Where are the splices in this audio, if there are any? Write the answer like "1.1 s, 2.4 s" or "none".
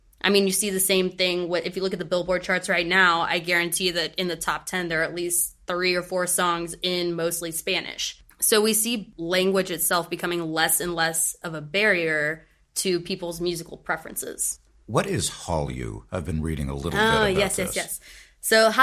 none